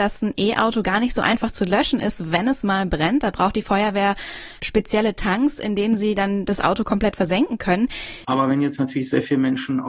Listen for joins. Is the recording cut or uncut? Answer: cut